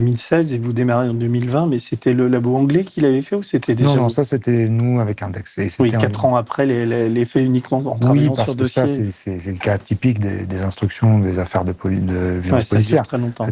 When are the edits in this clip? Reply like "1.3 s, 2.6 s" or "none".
none